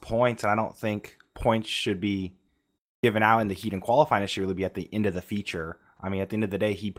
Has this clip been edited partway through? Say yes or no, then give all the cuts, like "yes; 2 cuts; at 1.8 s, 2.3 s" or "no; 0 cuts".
no; 0 cuts